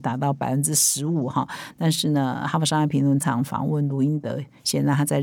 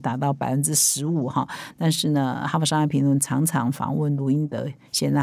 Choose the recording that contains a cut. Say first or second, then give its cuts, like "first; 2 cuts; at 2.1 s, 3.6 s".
first; 1 cut; at 3.2 s